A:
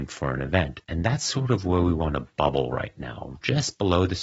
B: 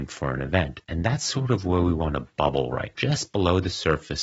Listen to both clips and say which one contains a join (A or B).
B